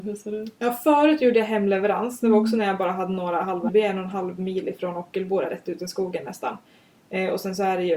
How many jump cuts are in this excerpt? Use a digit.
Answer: 1